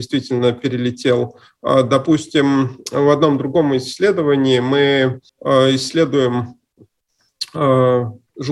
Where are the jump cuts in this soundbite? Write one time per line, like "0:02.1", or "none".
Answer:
0:05.3

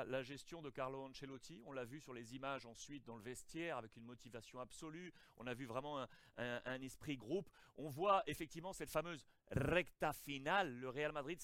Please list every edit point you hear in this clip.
none

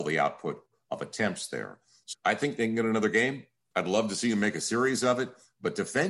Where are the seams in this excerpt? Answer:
0:02.1

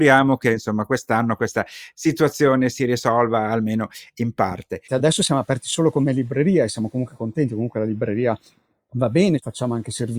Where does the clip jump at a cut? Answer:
0:04.9

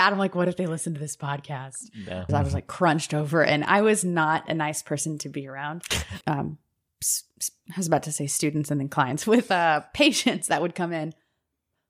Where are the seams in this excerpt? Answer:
0:02.3
0:06.2

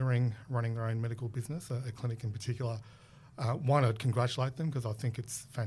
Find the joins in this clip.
none

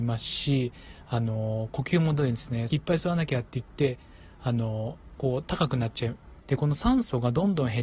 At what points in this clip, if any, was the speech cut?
0:02.7
0:06.4

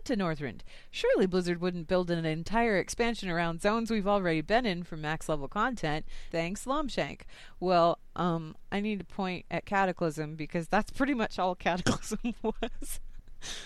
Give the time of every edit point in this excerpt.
0:06.3

